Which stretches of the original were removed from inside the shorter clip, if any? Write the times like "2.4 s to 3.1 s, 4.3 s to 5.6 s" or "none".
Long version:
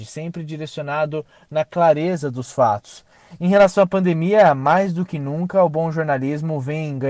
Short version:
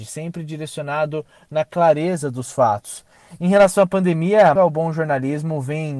4.6 s to 5.5 s